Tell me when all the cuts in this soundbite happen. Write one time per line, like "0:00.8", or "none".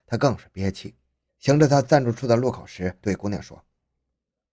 0:01.3
0:03.0